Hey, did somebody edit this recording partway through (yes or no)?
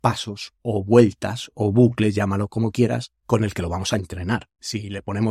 no